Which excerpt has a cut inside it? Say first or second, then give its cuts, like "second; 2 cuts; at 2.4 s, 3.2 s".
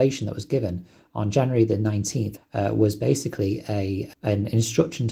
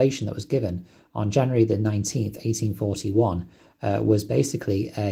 first; 2 cuts; at 2.4 s, 4.1 s